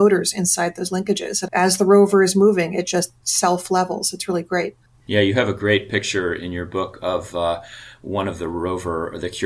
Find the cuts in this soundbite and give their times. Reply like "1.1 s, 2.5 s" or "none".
1.5 s